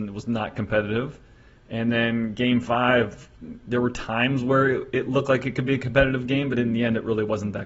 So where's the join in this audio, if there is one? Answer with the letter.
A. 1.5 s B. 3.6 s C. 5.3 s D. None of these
D